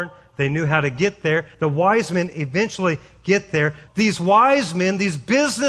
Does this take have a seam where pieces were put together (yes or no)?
yes